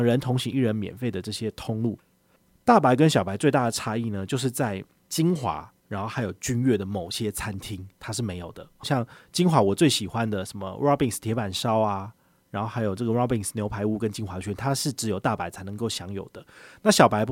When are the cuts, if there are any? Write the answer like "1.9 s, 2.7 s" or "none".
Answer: 8.8 s

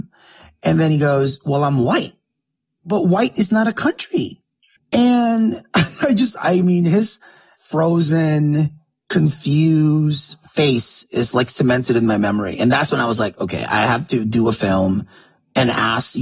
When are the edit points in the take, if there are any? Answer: 4.8 s

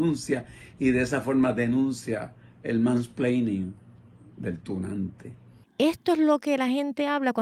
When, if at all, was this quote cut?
5.6 s

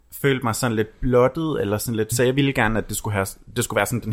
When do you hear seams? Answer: 2.1 s

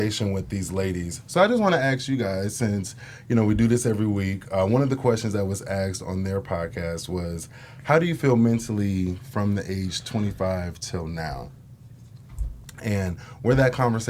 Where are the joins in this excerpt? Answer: none

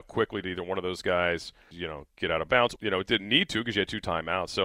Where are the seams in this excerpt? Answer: 1.7 s, 2.8 s

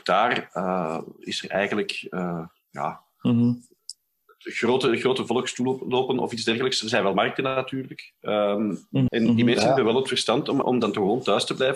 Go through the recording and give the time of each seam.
9.1 s, 10.6 s

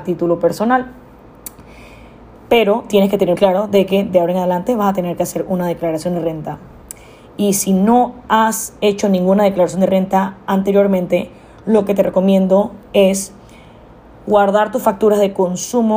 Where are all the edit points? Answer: 3.4 s

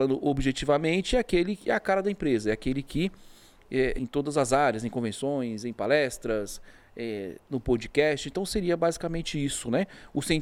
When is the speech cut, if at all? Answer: 4.0 s

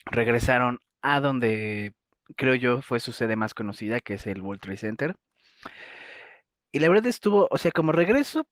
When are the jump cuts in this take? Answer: none

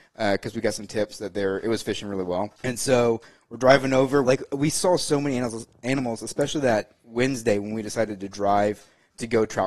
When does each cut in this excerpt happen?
2.6 s, 4.2 s

